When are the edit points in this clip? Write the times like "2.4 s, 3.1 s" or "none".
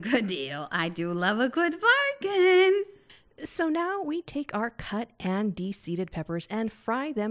none